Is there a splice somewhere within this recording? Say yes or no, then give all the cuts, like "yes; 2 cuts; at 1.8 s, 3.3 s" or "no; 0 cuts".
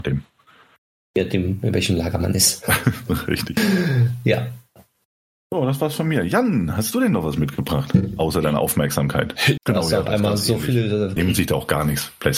yes; 2 cuts; at 9.6 s, 11.2 s